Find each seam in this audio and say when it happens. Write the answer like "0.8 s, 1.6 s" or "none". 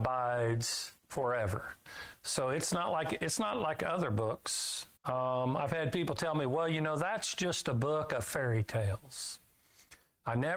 1.0 s, 5.0 s